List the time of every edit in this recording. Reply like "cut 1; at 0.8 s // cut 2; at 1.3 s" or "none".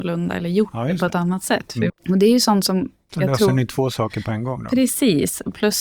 cut 1; at 1.9 s